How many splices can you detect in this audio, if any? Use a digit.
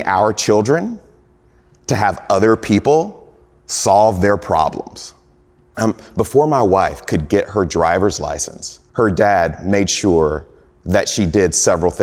2